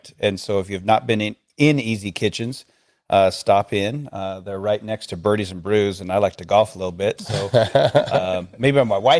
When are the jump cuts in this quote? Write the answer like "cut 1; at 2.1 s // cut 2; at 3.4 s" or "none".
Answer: none

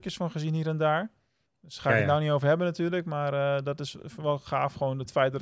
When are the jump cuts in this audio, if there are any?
cut 1; at 1.5 s

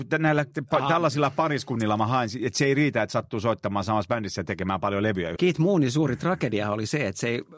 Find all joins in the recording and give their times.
cut 1; at 5.4 s

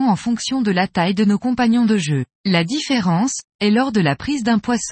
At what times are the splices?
cut 1; at 2.3 s // cut 2; at 3.5 s

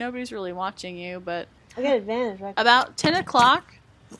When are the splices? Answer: cut 1; at 2.5 s

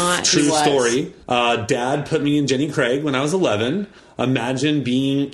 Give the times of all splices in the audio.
cut 1; at 1.2 s

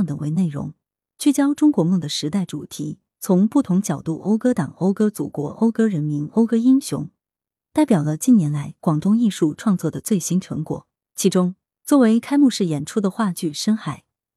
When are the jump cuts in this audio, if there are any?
none

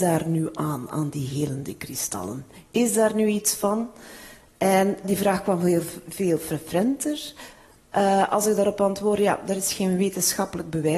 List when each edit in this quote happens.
cut 1; at 5.0 s

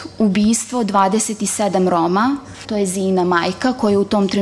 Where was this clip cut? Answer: cut 1; at 2.6 s

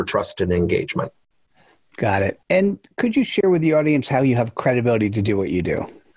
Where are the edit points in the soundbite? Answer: cut 1; at 2.4 s

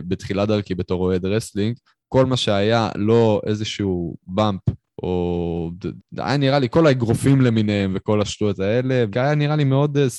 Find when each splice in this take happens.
cut 1; at 6.0 s // cut 2; at 9.1 s

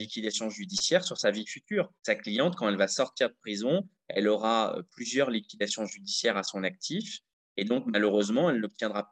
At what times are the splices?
cut 1; at 2.0 s

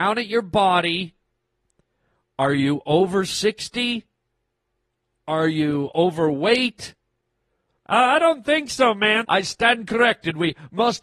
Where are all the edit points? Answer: cut 1; at 7.8 s // cut 2; at 9.2 s

